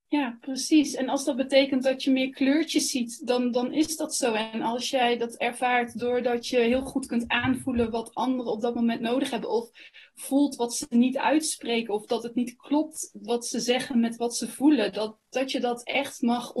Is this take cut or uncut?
uncut